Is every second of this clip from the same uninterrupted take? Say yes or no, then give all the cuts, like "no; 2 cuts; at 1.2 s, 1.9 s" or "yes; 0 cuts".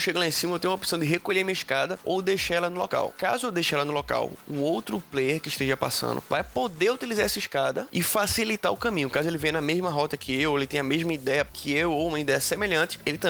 yes; 0 cuts